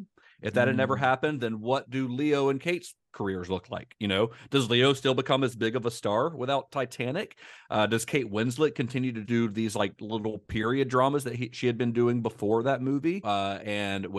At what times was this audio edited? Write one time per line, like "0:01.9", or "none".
0:09.2
0:13.2